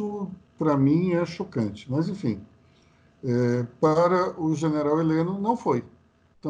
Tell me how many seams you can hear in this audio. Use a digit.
0